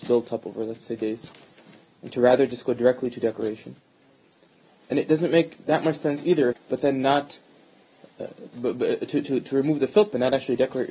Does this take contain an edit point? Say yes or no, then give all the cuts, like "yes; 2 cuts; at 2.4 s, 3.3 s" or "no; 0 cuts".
yes; 2 cuts; at 6.5 s, 8.5 s